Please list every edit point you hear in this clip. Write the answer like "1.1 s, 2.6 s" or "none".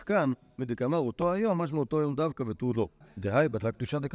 3.0 s